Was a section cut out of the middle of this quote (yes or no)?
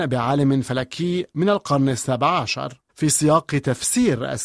yes